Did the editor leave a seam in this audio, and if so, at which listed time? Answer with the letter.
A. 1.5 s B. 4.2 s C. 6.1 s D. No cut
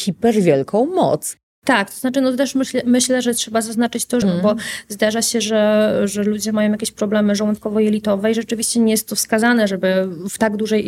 B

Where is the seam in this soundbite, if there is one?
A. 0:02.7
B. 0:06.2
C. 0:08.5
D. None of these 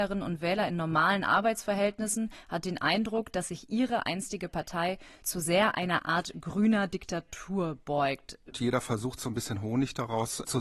C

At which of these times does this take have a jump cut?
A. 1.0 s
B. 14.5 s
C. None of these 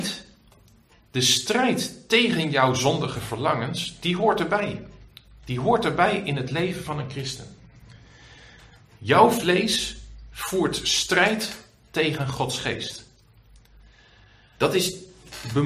B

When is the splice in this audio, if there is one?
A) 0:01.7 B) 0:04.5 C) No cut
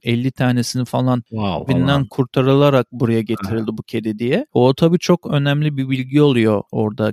A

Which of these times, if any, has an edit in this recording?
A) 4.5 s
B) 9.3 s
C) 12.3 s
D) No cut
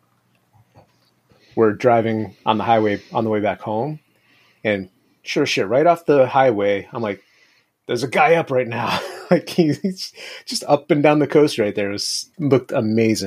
C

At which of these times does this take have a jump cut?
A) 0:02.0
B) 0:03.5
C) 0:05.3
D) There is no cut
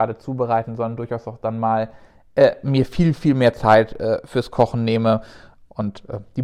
D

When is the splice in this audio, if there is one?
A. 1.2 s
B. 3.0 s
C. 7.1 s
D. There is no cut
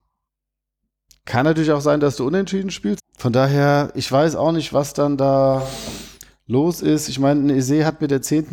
B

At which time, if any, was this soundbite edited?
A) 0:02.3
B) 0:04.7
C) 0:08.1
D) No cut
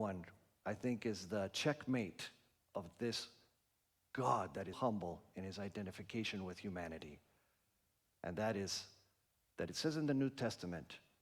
B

